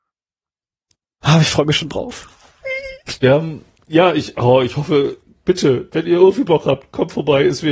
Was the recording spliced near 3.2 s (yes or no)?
no